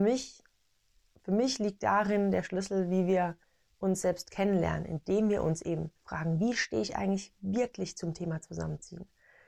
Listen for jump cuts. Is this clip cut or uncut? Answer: cut